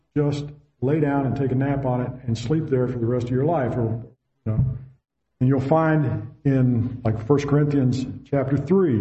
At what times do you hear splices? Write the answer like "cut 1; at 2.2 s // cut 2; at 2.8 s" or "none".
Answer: cut 1; at 5.2 s

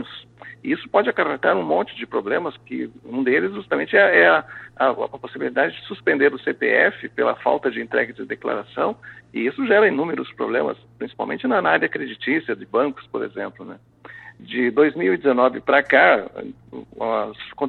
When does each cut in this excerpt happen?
cut 1; at 14.4 s // cut 2; at 16.5 s

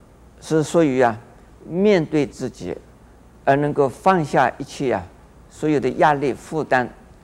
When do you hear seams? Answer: none

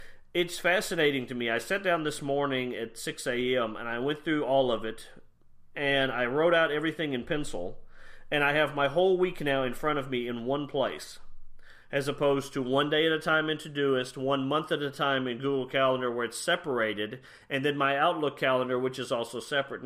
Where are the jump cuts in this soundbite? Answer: none

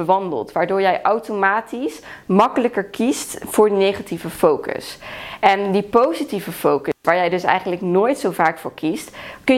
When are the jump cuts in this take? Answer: none

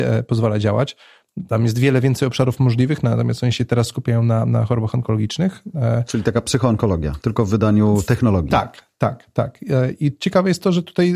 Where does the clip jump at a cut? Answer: none

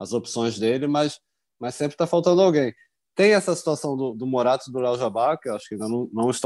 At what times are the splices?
none

